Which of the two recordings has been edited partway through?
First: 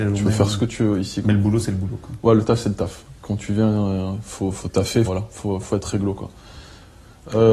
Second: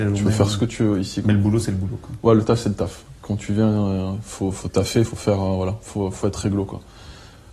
first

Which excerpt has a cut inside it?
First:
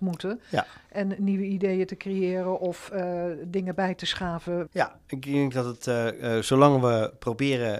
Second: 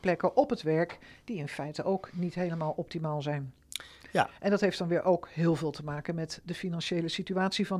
first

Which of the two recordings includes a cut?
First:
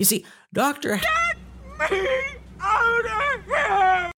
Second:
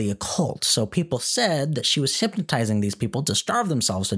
first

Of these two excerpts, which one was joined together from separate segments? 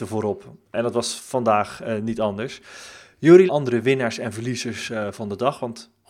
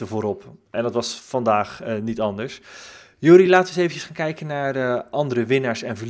first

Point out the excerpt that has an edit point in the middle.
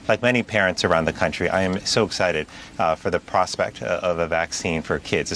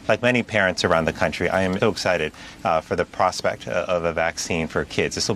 second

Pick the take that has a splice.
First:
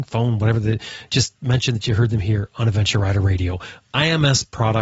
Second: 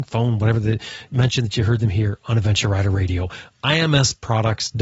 second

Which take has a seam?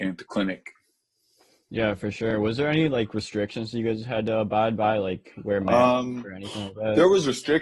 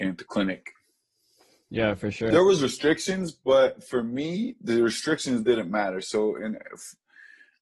second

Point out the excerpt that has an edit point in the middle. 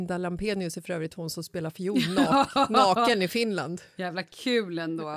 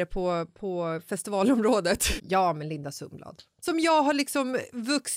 second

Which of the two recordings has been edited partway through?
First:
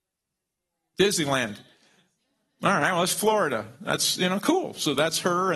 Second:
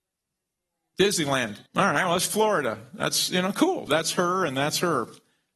second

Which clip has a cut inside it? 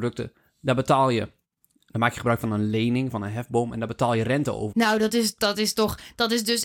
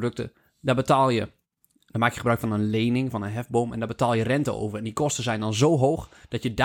first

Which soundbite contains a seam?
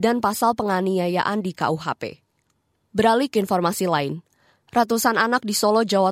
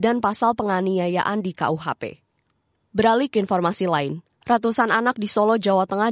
second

